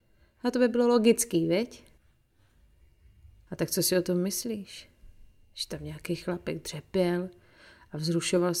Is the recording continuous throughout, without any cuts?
yes; 0 cuts

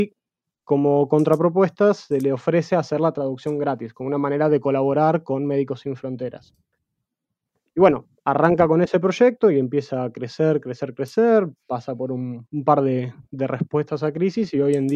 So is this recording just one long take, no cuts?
yes; 0 cuts

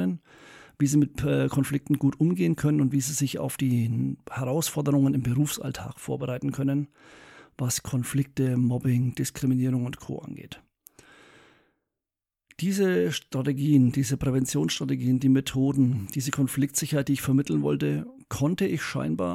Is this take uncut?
yes; 0 cuts

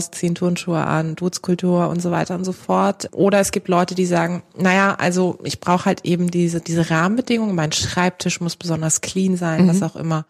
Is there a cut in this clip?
no; 0 cuts

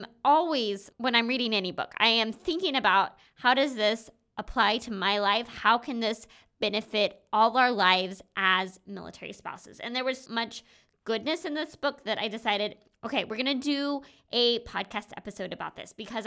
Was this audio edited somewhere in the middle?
yes; 2 cuts; at 0.9 s, 10.3 s

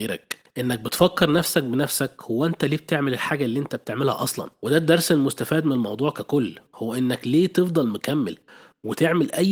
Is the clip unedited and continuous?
yes; 0 cuts

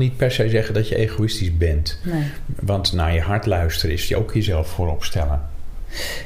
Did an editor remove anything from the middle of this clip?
no; 0 cuts

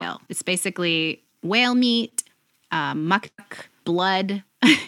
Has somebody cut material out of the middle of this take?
yes; 2 cuts; at 1.3 s, 3.8 s

